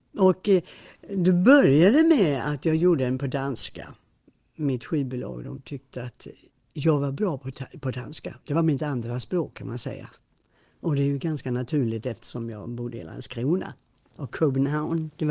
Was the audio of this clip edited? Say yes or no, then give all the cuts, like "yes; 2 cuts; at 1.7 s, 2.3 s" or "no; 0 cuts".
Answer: no; 0 cuts